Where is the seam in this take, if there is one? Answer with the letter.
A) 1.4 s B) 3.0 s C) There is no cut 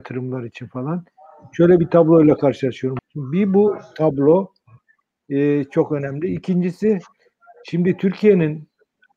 B